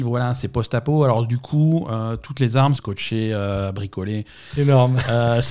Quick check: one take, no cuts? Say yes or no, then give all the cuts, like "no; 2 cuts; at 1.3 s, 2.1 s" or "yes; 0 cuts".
no; 2 cuts; at 2.8 s, 4.5 s